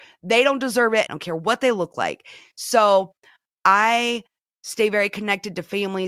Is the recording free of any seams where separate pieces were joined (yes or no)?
no